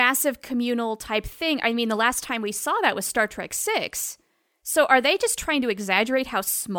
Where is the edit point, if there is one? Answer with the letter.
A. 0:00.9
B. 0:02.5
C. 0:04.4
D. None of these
D